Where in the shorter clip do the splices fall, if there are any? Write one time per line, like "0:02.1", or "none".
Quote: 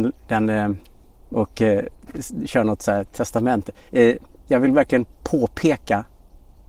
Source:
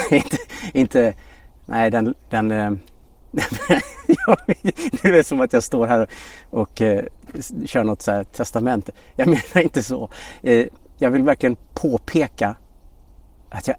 0:01.3
0:03.9